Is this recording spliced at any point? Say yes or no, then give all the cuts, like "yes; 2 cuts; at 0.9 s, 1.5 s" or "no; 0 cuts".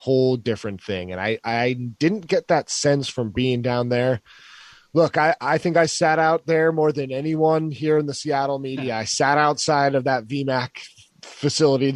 no; 0 cuts